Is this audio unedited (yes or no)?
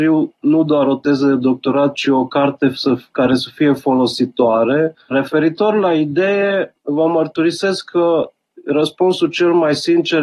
no